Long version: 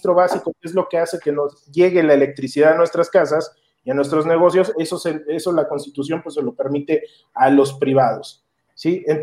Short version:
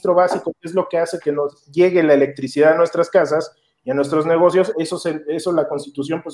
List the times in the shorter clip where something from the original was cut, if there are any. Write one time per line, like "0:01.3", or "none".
none

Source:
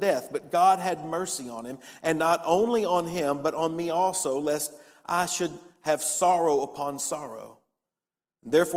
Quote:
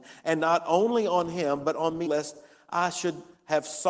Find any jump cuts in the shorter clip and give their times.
0:02.1

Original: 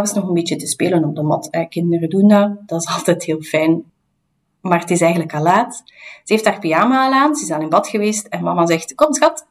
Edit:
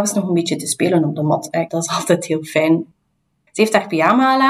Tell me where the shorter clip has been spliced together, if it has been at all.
0:01.7
0:03.5

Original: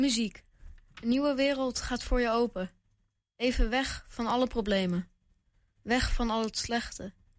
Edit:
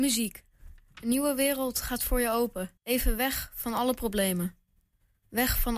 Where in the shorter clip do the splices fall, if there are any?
0:02.8

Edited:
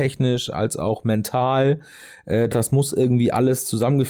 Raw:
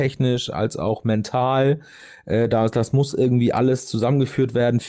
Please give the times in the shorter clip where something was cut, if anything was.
0:02.5

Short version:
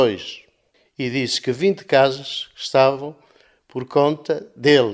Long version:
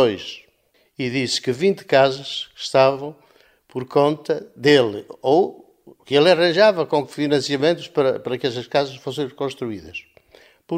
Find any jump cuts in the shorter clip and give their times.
none

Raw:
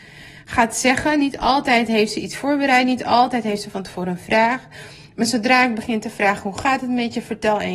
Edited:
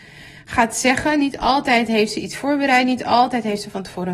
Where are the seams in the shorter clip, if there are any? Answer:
none

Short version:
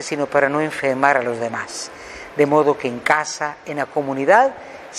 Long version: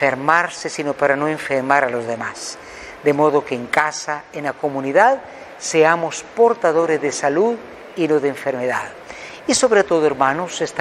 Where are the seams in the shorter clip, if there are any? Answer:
none

